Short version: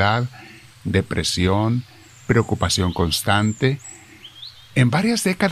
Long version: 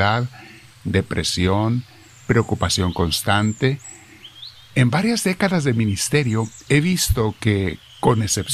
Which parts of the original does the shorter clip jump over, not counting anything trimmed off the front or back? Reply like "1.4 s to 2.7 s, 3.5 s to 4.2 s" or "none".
none